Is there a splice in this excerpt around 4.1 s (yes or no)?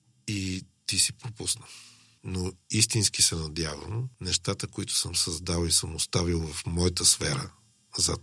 yes